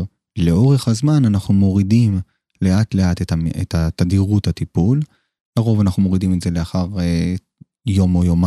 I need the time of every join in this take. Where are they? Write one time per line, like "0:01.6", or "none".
none

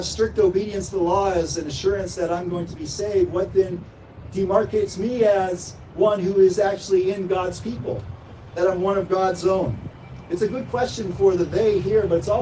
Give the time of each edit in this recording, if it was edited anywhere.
none

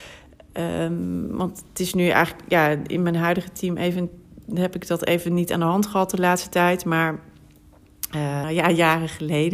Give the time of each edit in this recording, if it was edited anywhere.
0:08.4

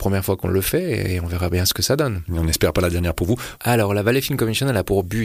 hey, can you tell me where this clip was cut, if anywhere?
0:03.6

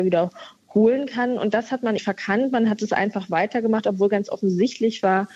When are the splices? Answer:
0:02.0

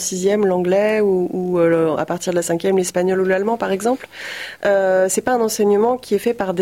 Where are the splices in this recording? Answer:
none

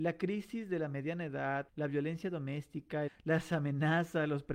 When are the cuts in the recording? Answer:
0:01.7
0:03.1

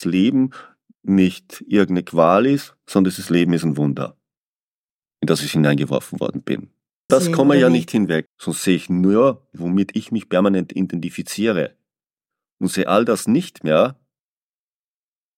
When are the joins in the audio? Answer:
0:07.1
0:08.3

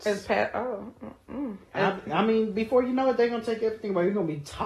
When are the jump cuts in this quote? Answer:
0:01.7

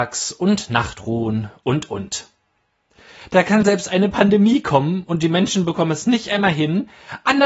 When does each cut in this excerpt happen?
0:01.6

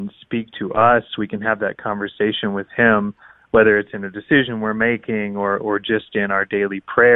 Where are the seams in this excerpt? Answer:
none

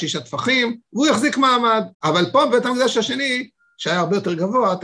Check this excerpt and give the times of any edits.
0:01.9

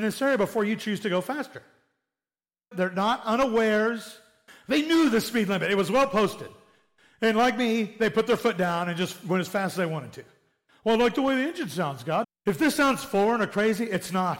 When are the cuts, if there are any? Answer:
0:02.7
0:04.5
0:12.2

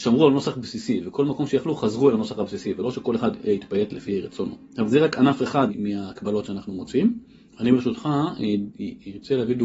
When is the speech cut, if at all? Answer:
0:07.5

